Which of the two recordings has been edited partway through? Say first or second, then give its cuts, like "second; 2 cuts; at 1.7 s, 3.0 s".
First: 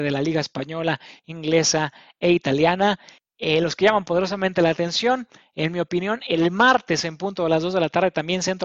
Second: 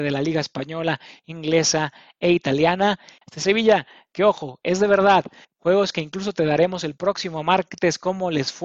second; 2 cuts; at 3.2 s, 5.6 s